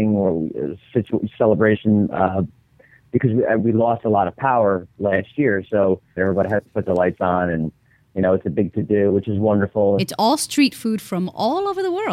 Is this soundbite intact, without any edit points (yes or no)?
no